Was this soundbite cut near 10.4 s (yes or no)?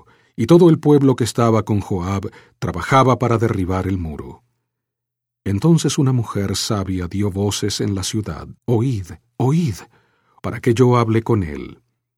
yes